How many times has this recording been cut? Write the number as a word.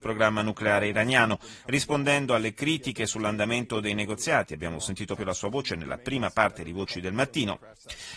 one